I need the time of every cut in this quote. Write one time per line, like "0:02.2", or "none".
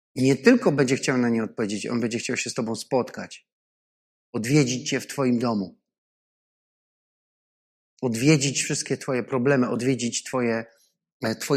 none